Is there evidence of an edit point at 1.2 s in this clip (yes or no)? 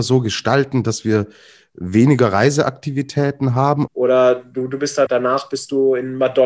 no